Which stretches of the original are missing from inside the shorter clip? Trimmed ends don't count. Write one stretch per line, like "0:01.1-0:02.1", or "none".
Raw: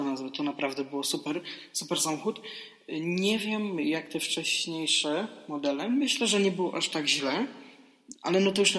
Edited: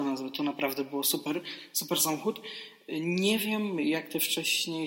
none